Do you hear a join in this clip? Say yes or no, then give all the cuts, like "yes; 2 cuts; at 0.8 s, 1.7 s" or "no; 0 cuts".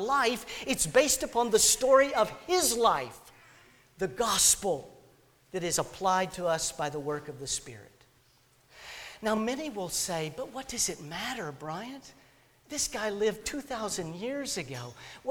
no; 0 cuts